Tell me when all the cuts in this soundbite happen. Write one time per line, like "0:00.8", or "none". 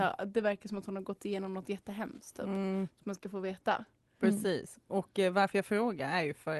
none